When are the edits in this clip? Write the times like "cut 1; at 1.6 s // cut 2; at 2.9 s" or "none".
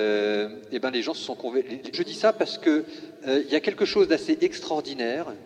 cut 1; at 1.9 s